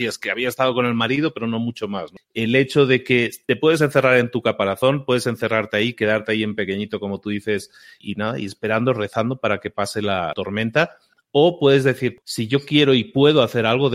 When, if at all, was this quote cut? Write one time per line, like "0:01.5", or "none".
0:02.2